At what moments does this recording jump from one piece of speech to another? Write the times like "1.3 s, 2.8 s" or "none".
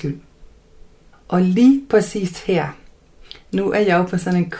1.1 s